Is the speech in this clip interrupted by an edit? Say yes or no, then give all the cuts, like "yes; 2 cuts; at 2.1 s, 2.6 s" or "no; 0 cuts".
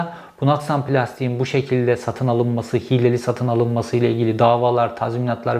no; 0 cuts